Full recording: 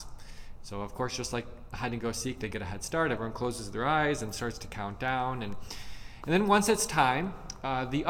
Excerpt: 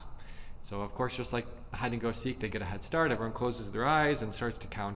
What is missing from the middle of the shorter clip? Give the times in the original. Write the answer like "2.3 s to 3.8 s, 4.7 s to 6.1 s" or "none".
none